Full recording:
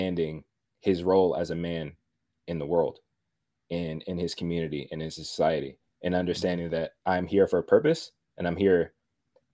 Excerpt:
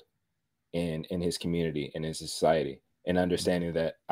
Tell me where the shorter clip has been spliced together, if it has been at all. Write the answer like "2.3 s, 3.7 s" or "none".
none

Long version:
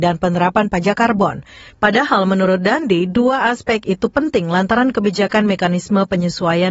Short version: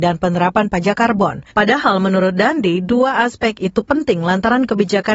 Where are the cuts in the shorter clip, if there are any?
1.5 s

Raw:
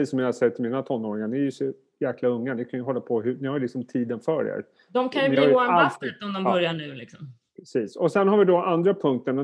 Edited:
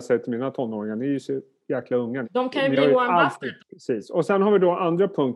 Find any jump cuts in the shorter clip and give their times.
2.2 s, 3.6 s

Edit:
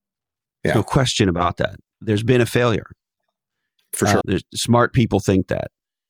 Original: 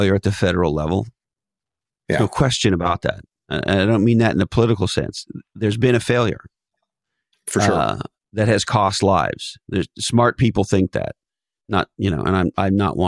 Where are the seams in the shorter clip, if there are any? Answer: 1.9 s, 4.2 s

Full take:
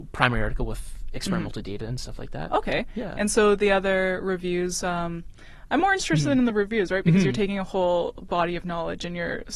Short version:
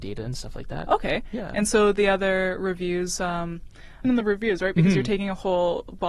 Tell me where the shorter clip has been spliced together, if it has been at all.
4.0 s

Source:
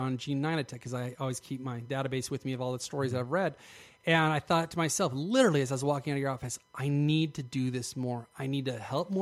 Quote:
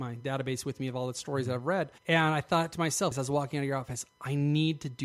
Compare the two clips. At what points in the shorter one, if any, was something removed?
2.0 s, 3.1 s

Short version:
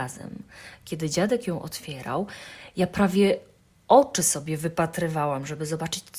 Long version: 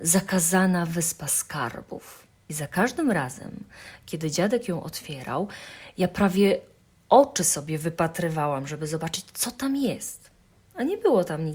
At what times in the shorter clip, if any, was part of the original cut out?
none

